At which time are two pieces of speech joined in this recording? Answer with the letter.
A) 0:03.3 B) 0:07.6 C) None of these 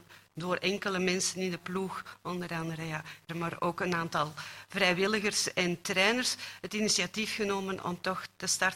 A